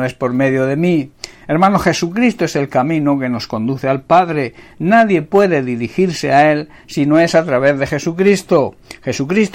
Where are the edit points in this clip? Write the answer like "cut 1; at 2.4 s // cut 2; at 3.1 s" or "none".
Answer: none

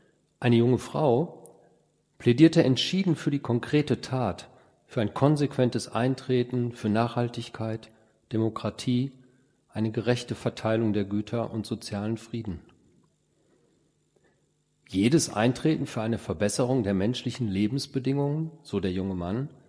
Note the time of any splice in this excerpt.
none

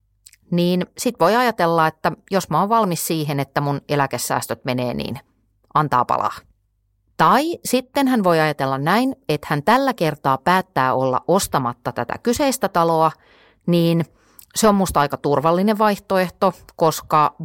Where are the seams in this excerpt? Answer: none

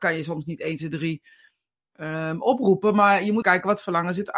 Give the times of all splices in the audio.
cut 1; at 3.4 s

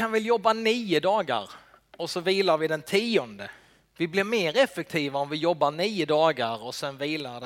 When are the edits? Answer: cut 1; at 3.9 s

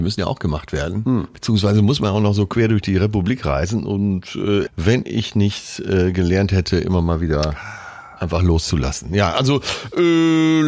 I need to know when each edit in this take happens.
cut 1; at 4.7 s

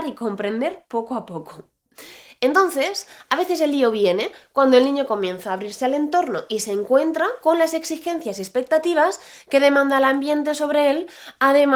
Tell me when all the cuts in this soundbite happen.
none

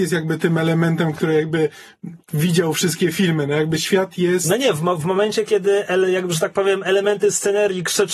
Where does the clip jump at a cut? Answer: none

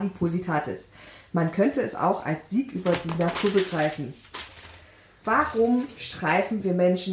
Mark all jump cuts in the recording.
none

